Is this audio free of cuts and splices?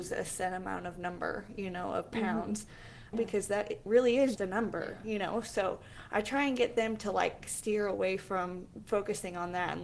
no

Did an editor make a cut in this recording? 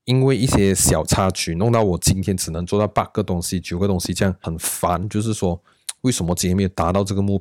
yes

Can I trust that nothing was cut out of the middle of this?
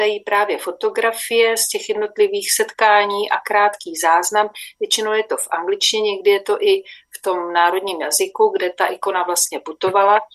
yes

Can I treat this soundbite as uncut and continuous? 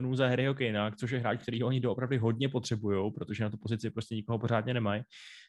yes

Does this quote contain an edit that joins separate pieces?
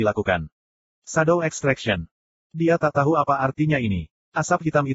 no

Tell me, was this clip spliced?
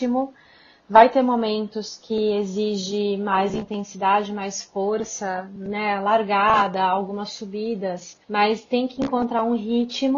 yes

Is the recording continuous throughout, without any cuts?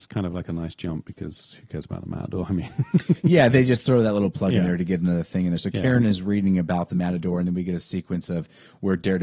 yes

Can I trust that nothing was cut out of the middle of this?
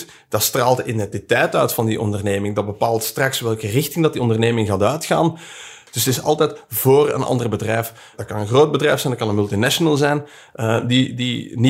yes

